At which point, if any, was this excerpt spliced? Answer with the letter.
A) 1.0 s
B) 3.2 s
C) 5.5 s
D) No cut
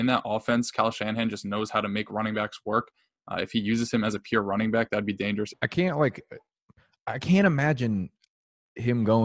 C